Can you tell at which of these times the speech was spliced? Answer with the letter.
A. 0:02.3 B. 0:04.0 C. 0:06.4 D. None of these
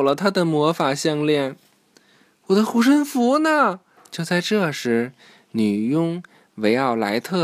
B